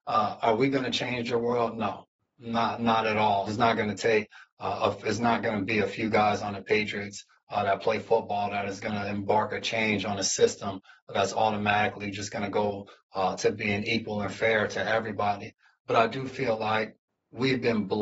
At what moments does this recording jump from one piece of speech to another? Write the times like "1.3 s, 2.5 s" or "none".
3.5 s